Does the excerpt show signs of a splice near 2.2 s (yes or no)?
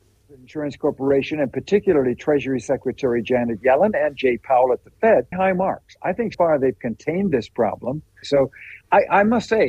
no